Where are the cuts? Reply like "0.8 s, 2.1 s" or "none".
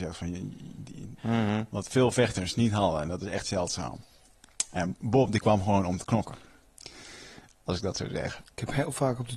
1.2 s